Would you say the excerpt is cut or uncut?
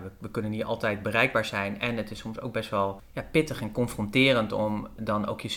uncut